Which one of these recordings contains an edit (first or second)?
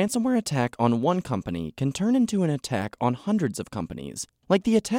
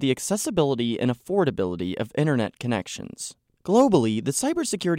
second